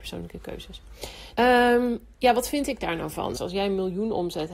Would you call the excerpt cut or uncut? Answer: cut